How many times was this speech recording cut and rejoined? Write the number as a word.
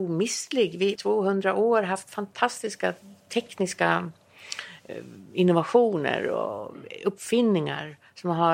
one